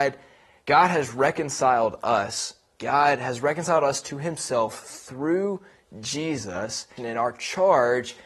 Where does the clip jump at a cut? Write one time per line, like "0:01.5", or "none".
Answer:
0:07.0

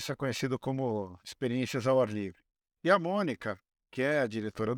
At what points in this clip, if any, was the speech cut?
0:02.8

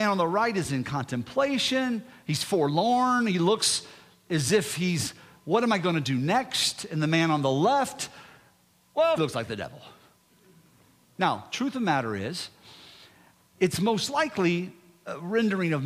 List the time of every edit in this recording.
0:09.2

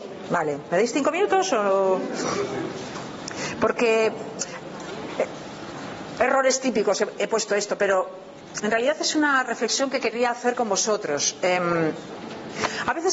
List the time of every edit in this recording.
none

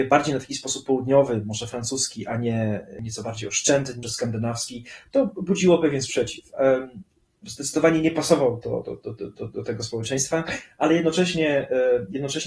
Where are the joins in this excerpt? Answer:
0:04.0

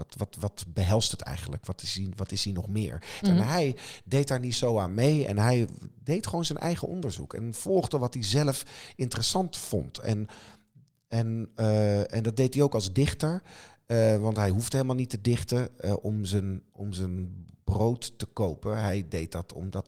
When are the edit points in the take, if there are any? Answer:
0:03.2

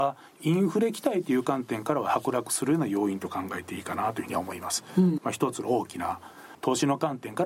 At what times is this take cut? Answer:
0:05.2

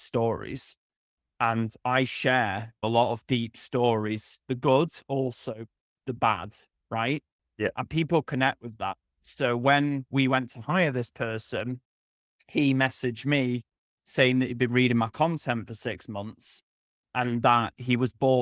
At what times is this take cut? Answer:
none

